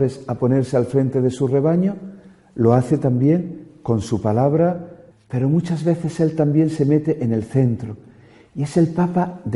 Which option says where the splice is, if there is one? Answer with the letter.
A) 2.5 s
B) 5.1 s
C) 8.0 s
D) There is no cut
B